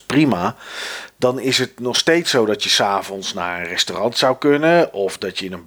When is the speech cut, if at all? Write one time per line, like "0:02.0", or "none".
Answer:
none